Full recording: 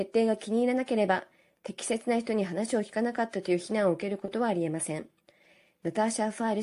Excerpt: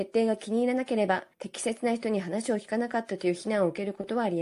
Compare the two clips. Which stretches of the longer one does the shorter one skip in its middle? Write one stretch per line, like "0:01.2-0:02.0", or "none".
0:01.3-0:01.6